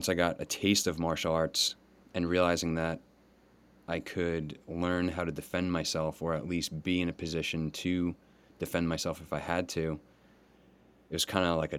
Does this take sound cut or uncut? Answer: uncut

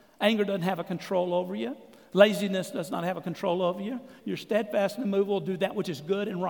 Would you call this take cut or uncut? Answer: cut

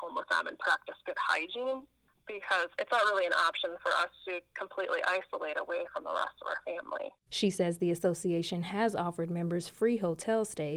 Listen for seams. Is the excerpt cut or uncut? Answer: cut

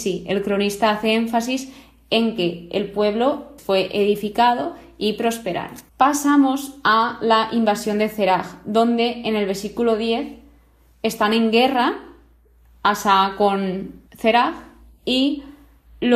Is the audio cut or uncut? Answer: cut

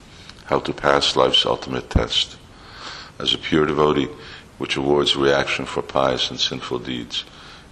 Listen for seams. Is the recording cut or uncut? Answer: cut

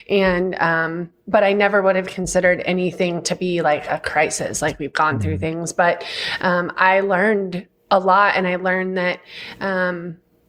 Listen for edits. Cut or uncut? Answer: uncut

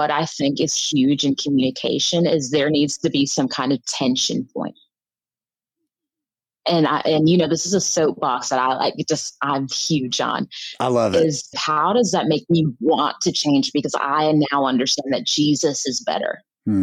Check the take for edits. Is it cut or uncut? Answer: cut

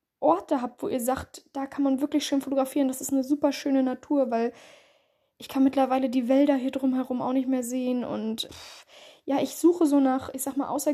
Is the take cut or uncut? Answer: cut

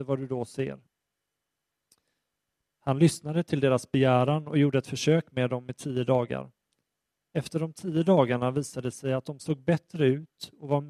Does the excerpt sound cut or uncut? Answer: uncut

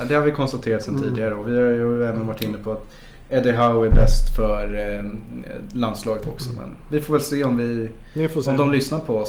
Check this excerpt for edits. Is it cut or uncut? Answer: uncut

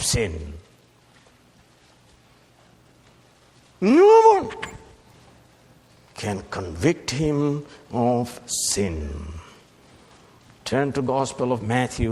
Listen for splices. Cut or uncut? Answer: uncut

